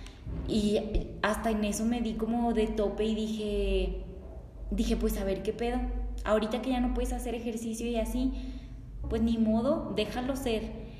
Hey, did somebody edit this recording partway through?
yes; 1 cut; at 9.0 s

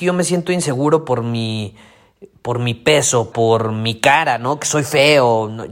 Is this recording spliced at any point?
yes; 1 cut; at 3.3 s

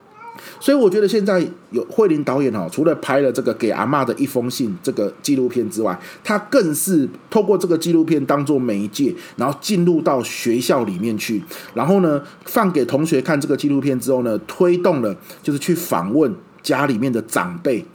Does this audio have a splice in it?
no; 0 cuts

